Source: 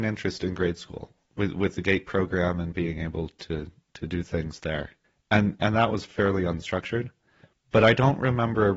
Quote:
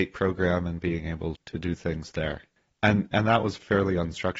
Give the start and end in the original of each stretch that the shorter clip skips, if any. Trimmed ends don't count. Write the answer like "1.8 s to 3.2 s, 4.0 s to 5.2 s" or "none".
3.3 s to 3.8 s